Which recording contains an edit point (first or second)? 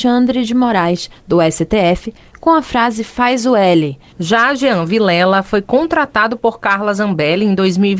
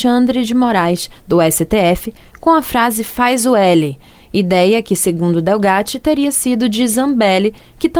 first